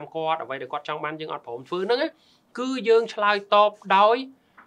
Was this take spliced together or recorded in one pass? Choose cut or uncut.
uncut